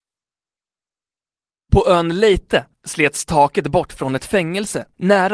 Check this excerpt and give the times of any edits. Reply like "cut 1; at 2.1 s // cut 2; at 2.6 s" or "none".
cut 1; at 2.7 s